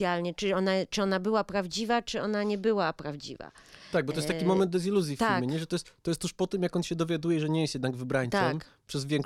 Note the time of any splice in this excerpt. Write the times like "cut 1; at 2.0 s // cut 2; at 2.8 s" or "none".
none